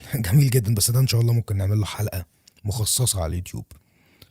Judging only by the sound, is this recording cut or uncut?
uncut